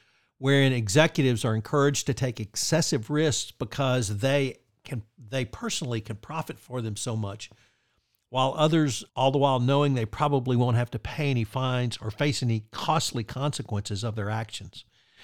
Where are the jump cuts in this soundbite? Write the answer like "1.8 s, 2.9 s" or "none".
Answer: 9.1 s

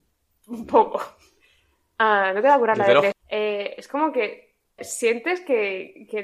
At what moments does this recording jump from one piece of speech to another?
3.1 s, 4.8 s

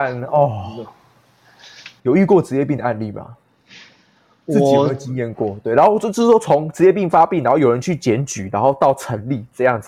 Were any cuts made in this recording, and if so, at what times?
2.0 s

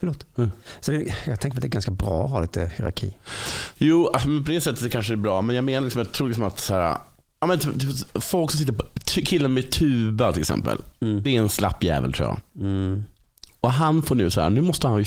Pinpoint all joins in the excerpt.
none

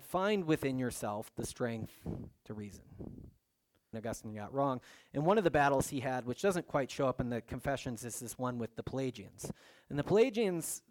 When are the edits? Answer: 3.9 s

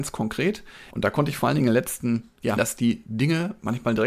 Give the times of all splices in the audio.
0.9 s, 2.6 s

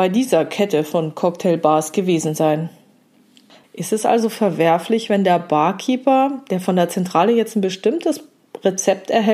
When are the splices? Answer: 3.6 s

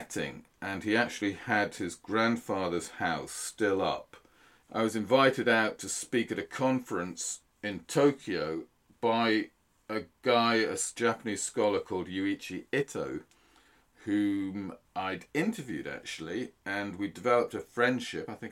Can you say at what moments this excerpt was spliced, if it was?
4.6 s, 14.9 s

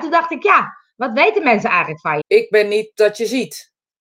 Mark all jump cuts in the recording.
2.2 s

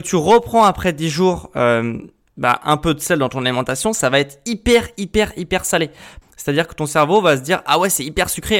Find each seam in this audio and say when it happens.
6.2 s

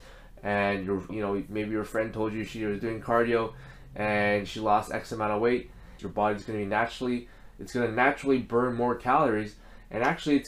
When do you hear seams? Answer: 1.1 s, 6.0 s

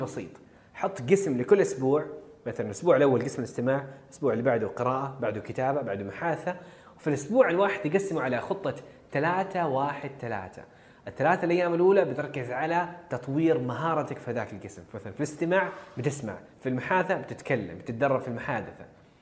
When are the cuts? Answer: 16.5 s

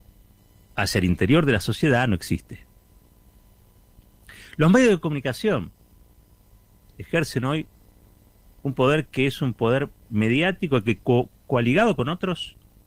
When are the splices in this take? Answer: none

